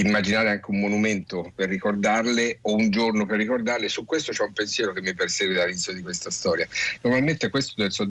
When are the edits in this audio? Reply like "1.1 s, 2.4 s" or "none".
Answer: 7.0 s